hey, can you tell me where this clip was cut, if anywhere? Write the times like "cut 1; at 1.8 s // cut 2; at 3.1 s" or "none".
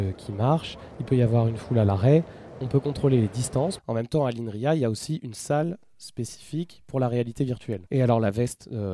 cut 1; at 3.8 s // cut 2; at 7.9 s